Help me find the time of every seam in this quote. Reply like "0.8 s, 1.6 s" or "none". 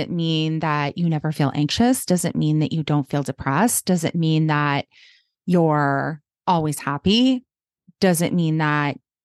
none